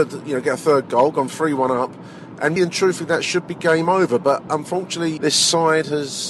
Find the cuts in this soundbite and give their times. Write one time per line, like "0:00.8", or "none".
0:02.6
0:05.2

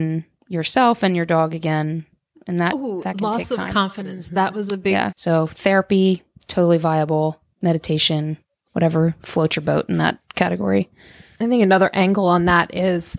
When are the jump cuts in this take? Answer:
0:05.1
0:08.7

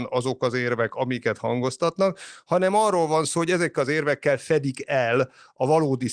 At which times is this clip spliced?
none

